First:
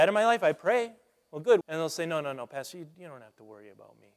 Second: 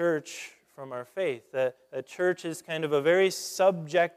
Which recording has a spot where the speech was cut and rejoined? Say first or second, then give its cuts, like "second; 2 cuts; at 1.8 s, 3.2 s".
first; 2 cuts; at 1.6 s, 2.9 s